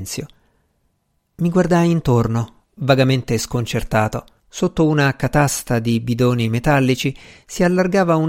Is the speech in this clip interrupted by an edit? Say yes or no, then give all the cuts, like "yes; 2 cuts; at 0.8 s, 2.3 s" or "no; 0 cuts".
yes; 1 cut; at 4.4 s